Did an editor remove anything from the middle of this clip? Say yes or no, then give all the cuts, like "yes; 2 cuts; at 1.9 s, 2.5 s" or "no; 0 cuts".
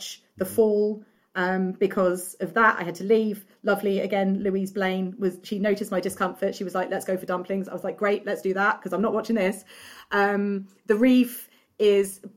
no; 0 cuts